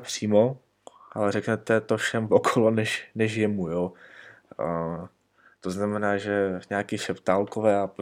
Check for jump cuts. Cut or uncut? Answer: uncut